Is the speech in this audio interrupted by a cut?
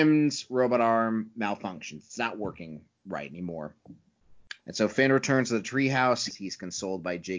yes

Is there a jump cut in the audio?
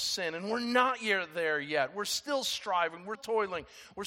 yes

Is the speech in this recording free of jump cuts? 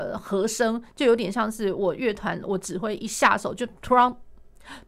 yes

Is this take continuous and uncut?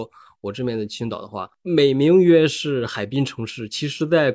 yes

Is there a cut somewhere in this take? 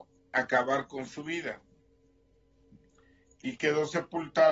no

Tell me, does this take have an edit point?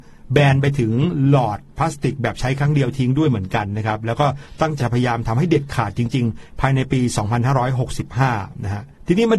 yes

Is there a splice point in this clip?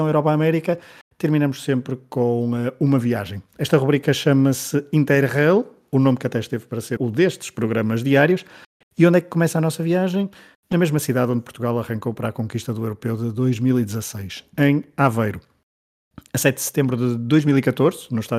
yes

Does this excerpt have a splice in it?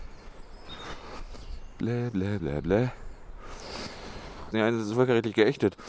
yes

